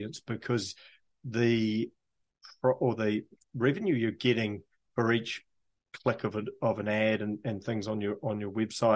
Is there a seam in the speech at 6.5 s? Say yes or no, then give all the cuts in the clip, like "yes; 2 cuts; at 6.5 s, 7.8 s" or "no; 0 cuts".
no; 0 cuts